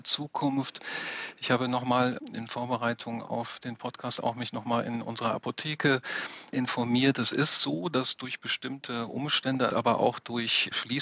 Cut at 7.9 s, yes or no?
no